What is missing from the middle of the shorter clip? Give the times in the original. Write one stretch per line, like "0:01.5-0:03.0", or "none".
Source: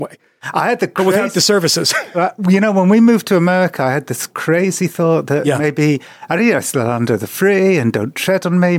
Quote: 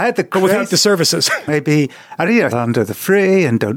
0:02.1-0:05.6
0:06.6-0:06.8

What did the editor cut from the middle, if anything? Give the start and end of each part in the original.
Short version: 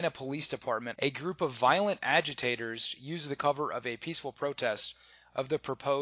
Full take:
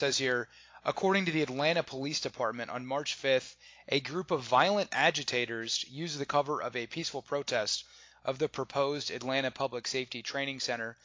0:02.7-0:03.8

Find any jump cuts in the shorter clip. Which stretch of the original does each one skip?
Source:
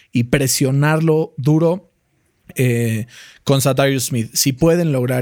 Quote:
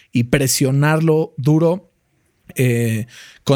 none

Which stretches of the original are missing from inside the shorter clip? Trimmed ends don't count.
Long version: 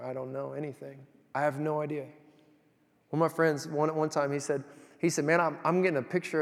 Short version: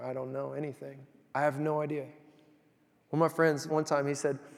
0:03.7-0:03.9

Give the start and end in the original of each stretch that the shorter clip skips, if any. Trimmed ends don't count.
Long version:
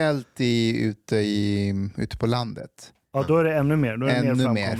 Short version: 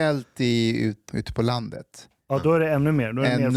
0:01.1-0:01.9

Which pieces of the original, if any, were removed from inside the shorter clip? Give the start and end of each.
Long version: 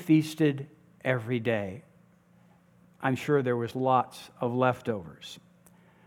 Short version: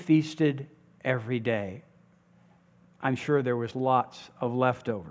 none

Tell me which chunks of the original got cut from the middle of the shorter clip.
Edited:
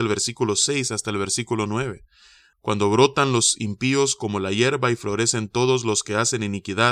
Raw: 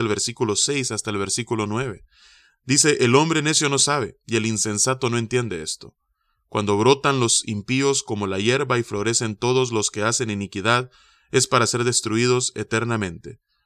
0:02.5-0:06.4

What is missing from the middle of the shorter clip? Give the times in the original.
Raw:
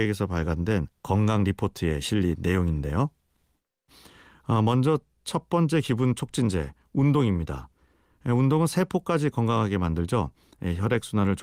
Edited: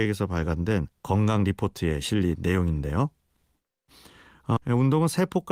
0:04.6-0:08.2

